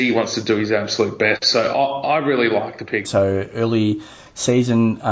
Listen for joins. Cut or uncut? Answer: cut